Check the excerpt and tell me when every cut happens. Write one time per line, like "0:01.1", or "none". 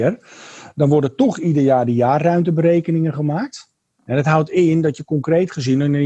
0:04.0